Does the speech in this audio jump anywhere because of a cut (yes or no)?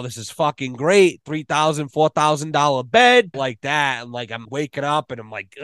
yes